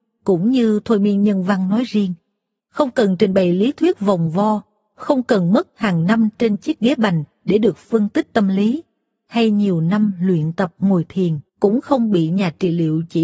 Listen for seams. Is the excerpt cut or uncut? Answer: cut